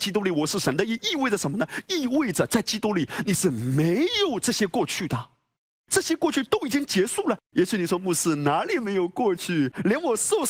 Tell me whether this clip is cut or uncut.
cut